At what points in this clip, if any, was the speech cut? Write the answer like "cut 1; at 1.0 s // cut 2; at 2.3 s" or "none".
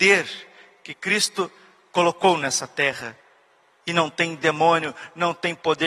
none